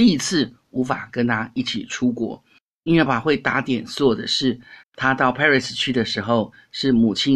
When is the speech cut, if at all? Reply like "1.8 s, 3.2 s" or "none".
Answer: 3.1 s, 4.8 s